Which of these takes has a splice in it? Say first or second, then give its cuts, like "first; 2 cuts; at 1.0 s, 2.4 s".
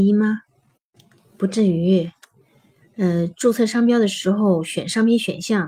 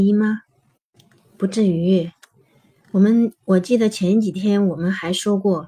first; 1 cut; at 2.8 s